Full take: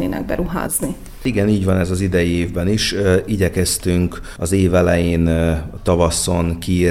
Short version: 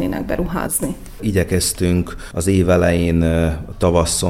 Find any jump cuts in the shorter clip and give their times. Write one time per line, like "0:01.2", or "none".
0:01.2